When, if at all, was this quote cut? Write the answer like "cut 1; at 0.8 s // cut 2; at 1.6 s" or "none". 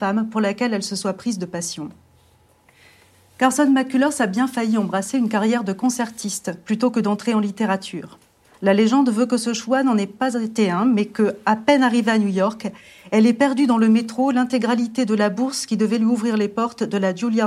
none